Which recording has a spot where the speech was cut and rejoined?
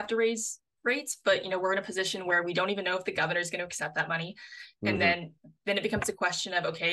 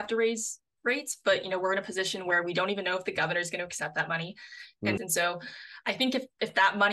second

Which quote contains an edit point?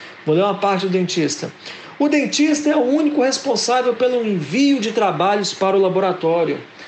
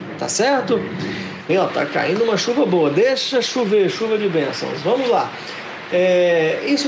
second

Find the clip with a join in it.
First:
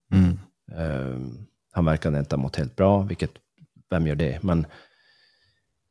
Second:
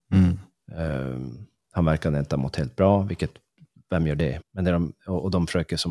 second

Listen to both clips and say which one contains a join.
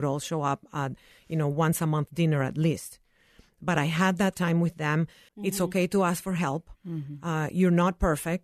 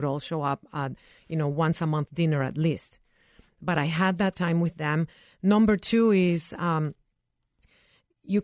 first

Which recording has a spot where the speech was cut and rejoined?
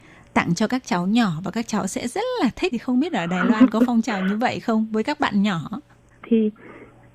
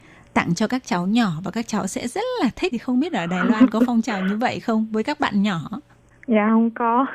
first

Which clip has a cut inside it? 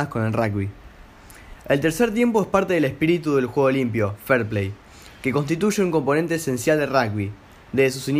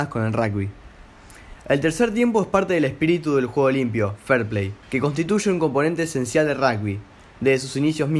second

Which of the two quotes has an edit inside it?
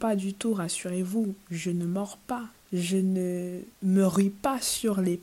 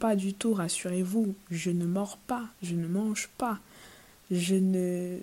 first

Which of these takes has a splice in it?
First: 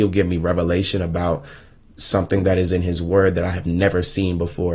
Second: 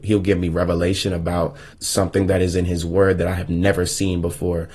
second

